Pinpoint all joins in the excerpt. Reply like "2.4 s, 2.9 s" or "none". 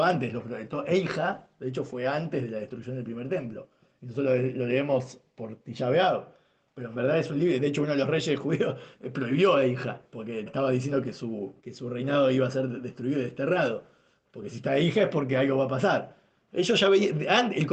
10.5 s, 11.6 s